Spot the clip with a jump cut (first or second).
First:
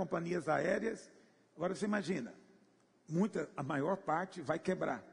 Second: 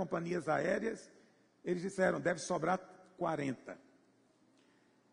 first